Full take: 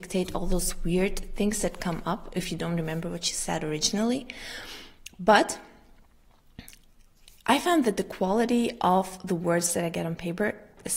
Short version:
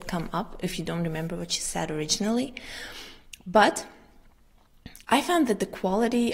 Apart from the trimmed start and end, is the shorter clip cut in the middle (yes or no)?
yes